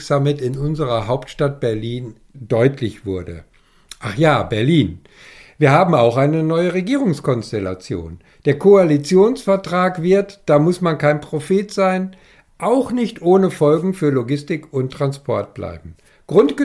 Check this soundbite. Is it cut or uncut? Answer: uncut